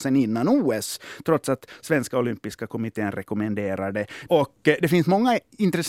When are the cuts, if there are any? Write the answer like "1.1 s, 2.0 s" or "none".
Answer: 4.3 s